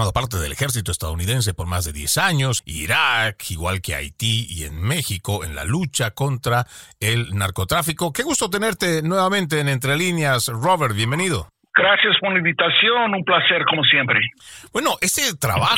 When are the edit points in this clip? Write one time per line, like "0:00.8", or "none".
0:02.6